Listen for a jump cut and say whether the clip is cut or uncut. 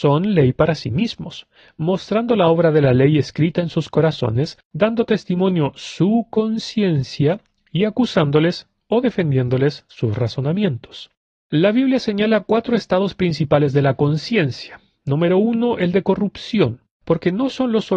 cut